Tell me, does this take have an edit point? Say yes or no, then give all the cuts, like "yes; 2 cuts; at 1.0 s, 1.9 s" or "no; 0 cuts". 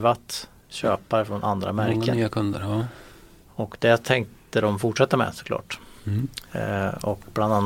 no; 0 cuts